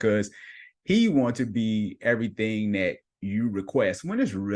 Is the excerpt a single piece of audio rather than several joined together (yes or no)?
yes